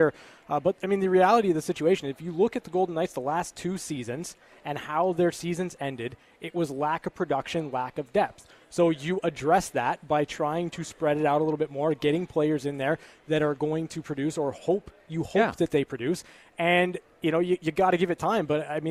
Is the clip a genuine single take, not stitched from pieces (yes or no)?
yes